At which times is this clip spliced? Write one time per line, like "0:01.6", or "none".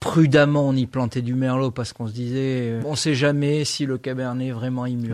0:02.8